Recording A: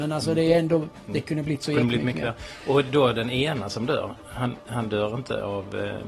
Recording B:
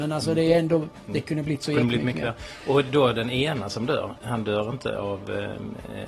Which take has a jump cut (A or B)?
B